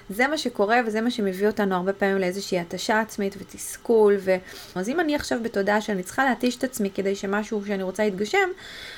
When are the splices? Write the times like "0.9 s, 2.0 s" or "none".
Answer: 4.8 s